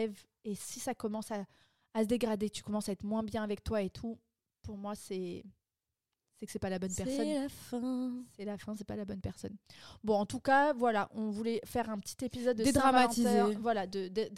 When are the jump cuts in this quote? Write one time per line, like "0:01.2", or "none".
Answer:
none